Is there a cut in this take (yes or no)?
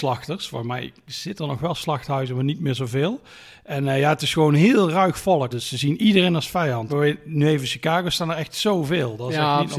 yes